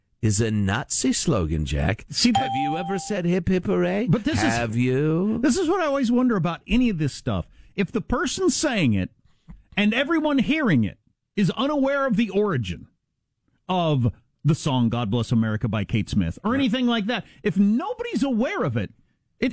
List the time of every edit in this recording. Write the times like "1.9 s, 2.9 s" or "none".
none